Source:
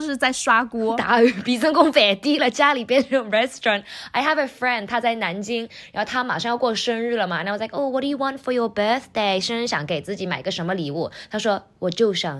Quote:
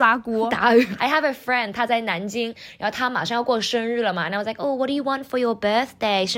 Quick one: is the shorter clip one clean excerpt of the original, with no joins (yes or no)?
no